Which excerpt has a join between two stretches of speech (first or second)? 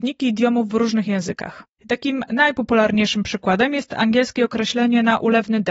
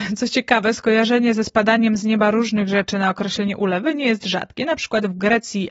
first